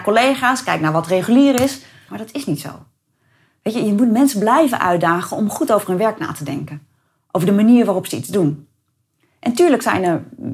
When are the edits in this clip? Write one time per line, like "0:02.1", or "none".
0:02.1

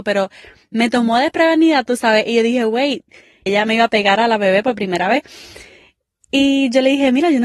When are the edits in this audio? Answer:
0:03.5

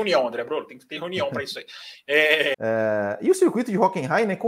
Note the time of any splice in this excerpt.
0:02.5

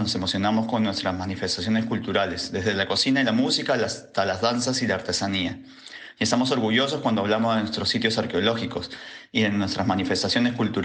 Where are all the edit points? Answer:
none

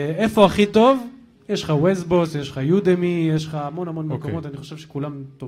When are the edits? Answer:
none

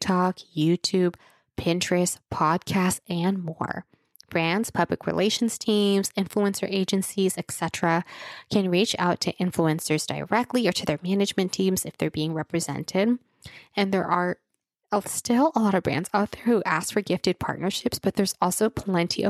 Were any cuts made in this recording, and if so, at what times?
none

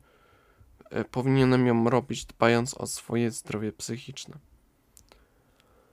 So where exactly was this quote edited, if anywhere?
none

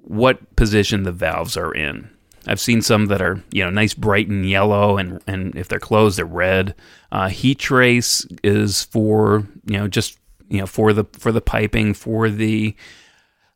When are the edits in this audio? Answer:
0:02.3
0:06.9

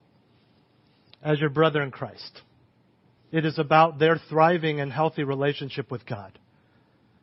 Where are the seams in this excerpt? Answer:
0:03.3

